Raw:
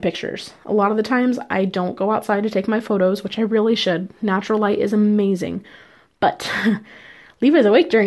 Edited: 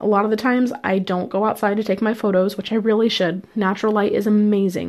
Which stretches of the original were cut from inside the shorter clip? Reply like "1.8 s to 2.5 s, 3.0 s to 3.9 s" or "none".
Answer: none